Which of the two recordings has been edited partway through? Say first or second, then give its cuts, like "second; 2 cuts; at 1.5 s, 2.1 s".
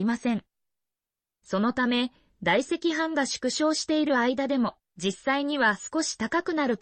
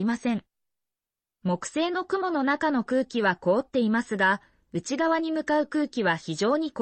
first; 1 cut; at 1.4 s